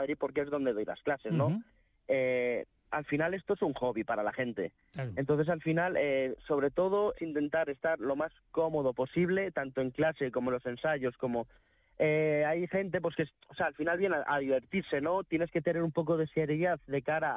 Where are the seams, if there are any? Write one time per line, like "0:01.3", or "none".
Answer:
0:07.1